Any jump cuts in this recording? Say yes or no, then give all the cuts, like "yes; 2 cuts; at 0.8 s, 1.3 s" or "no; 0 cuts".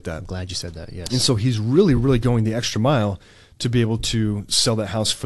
no; 0 cuts